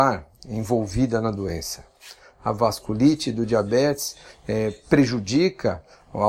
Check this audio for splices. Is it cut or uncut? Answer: uncut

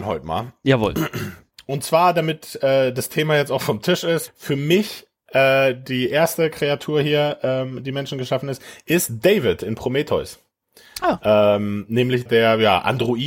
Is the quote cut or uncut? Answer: cut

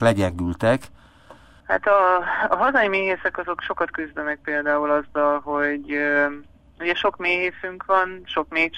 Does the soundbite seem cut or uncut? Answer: cut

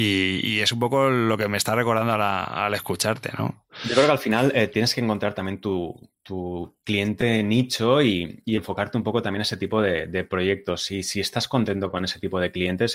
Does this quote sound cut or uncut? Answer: uncut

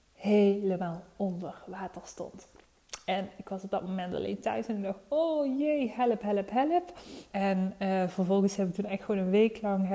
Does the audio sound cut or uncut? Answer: cut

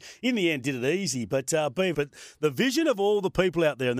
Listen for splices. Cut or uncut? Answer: cut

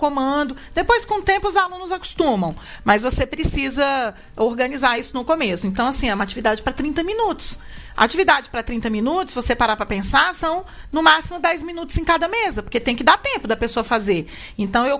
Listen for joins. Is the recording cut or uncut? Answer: uncut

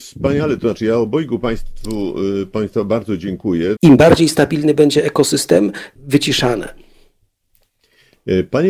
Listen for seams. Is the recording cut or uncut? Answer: cut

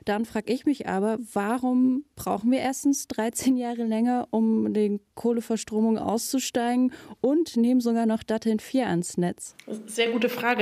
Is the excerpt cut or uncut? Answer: uncut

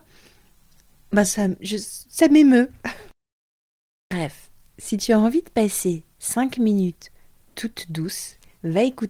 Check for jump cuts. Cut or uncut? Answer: uncut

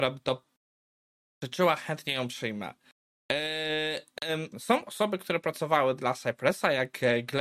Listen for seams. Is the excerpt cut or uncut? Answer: cut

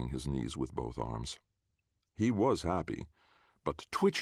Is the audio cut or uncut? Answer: uncut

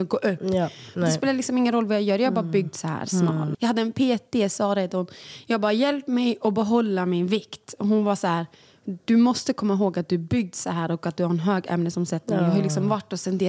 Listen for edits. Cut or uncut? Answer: cut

